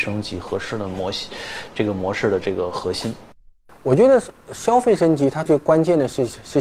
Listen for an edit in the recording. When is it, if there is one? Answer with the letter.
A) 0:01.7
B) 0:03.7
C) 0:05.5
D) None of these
C